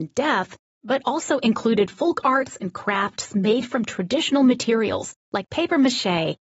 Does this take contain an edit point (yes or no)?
no